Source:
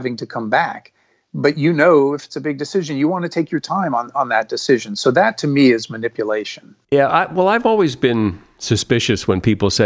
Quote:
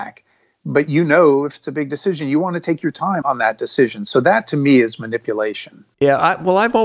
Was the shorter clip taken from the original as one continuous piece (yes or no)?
no